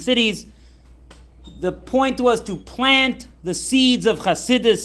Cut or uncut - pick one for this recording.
uncut